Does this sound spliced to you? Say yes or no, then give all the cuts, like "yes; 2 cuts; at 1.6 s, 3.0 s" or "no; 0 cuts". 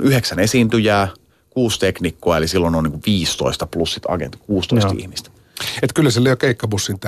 no; 0 cuts